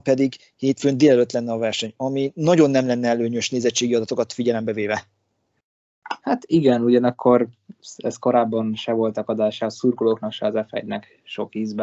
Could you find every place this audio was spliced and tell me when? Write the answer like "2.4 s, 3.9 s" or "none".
none